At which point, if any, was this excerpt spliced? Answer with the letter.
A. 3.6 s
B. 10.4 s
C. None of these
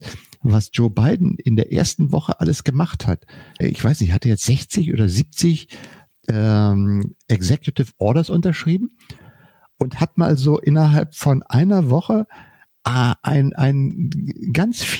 A